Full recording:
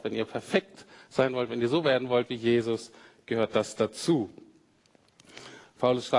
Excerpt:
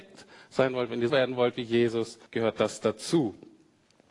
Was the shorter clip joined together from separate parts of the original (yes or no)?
yes